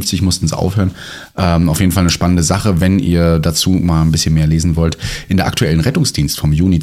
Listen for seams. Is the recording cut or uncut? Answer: uncut